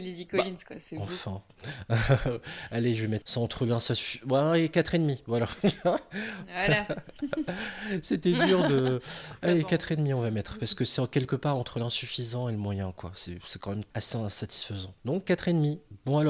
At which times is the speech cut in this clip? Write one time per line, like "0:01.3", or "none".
none

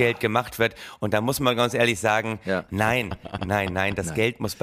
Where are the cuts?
0:03.4

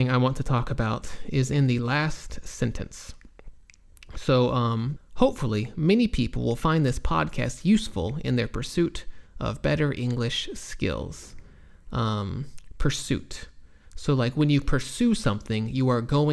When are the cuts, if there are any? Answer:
0:05.0

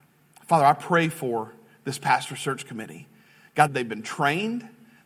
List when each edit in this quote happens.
0:03.7

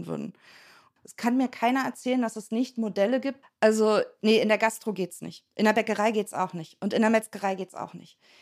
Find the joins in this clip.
0:01.0
0:03.4

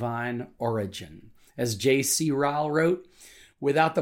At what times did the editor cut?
none

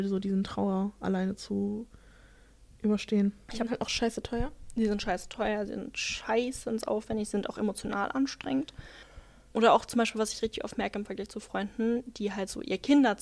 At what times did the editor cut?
0:03.5

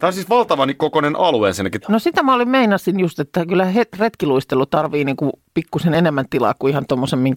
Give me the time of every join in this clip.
0:01.8

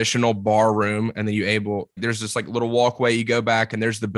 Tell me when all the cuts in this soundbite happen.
0:02.0

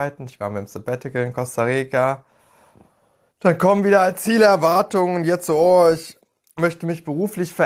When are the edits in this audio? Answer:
none

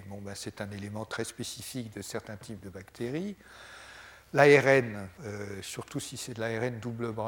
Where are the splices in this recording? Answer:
0:05.2

